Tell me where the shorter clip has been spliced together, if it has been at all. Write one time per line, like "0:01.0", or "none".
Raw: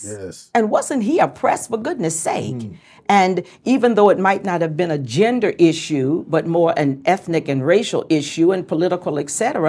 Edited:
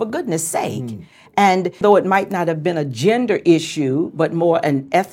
0:01.8